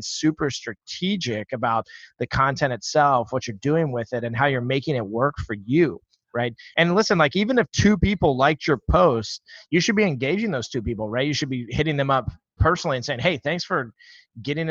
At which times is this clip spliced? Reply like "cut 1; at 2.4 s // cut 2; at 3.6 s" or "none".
none